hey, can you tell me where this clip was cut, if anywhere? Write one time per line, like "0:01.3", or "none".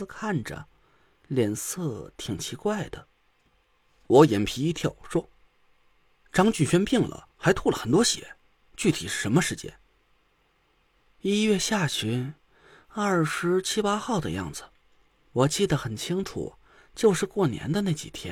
none